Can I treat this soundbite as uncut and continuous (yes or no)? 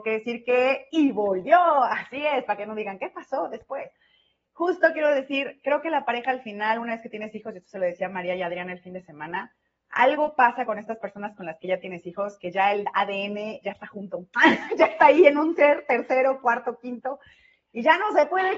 yes